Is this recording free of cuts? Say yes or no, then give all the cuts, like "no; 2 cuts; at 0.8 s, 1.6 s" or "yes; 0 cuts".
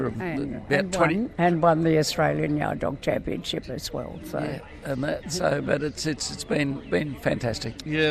yes; 0 cuts